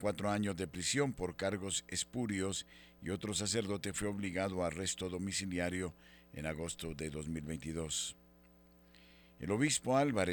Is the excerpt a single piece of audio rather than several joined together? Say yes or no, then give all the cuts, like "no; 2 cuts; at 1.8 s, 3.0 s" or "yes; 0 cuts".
yes; 0 cuts